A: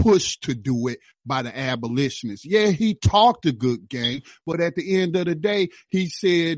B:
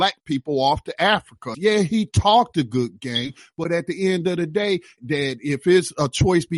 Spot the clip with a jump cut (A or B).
B